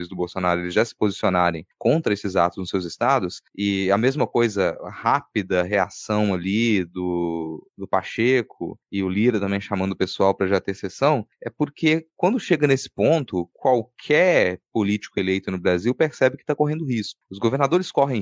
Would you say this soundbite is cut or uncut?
uncut